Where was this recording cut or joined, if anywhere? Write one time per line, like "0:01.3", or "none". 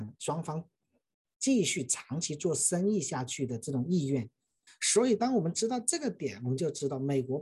0:04.7